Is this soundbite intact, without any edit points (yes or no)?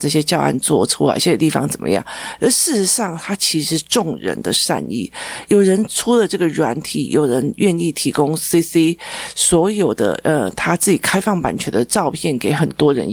yes